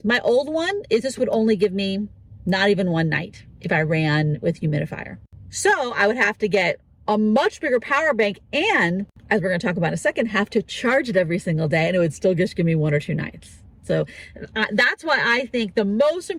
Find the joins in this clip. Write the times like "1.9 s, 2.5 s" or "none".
none

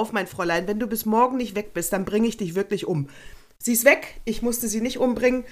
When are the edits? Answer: none

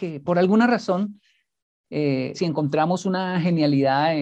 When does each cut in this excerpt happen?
2.3 s

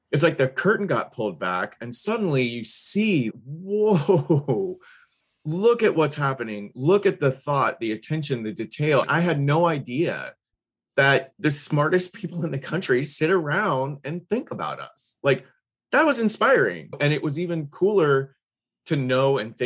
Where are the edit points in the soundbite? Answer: none

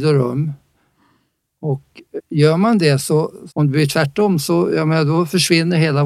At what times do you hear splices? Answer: 2.2 s, 3.5 s

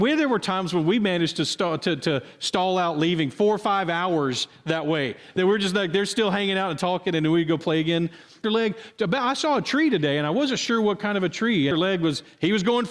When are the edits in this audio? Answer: 8.4 s, 11.7 s

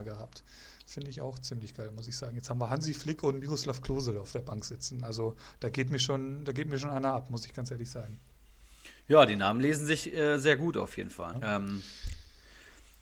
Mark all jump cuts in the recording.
11.3 s

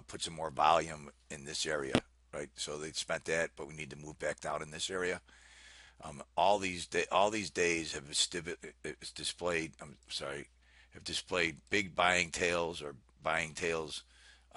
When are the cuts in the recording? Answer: none

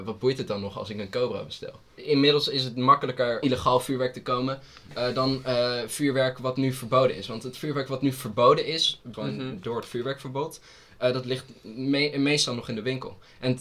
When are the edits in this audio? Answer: 2.0 s, 3.4 s, 9.1 s

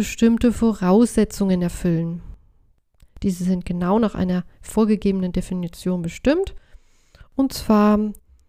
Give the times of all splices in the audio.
none

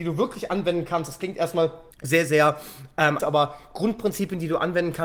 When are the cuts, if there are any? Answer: 1.9 s, 3.2 s

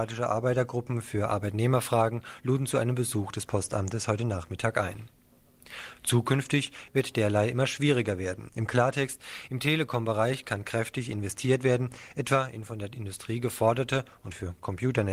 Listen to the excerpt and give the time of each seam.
6.9 s, 8.5 s

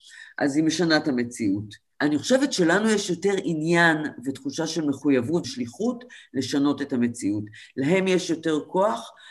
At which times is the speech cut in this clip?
1.9 s, 5.4 s

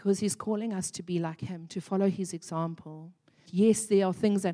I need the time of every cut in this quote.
3.5 s

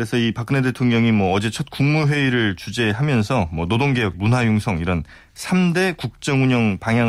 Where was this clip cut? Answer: 4.1 s

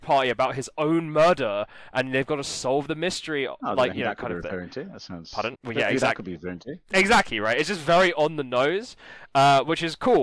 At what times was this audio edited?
5.5 s

